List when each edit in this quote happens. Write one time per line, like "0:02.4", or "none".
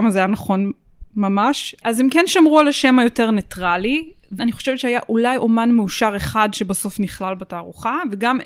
0:01.8
0:04.4